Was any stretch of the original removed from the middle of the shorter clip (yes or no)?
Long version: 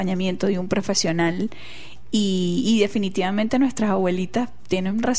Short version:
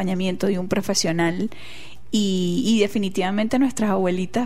no